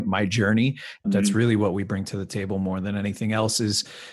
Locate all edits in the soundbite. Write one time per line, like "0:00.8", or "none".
0:01.0